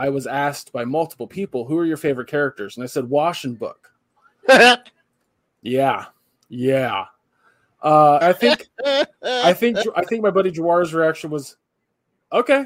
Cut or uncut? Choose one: cut